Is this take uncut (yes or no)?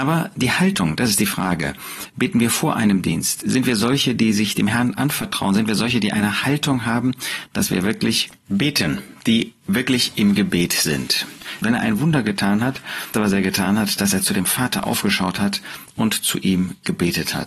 no